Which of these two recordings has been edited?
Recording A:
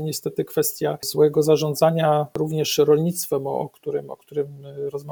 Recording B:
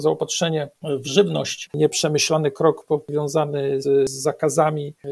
B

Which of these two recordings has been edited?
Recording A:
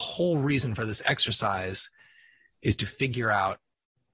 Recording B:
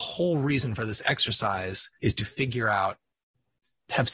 B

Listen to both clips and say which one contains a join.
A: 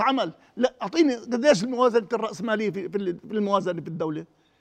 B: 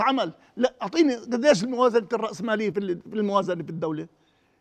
B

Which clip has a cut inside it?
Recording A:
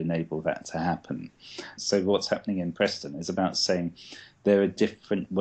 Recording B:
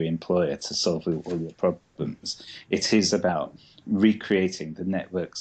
A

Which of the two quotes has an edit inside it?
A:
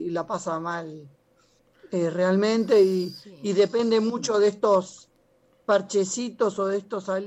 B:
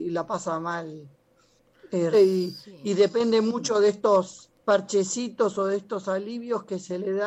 B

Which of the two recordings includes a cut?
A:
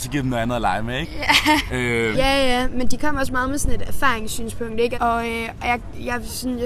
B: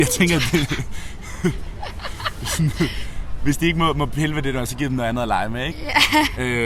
A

